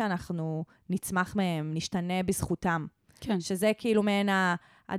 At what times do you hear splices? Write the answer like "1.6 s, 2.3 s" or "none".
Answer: 1.7 s